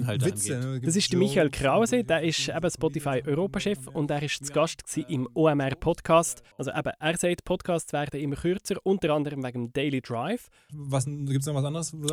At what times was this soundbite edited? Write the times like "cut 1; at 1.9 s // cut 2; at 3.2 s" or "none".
cut 1; at 6.5 s // cut 2; at 10.7 s